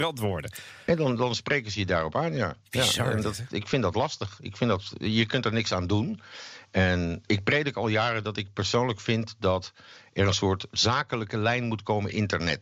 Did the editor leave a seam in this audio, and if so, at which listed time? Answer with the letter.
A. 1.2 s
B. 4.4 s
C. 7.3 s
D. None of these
C